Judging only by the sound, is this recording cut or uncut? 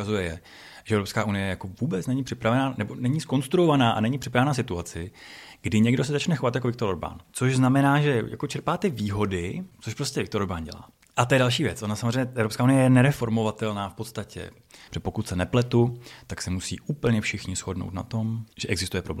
cut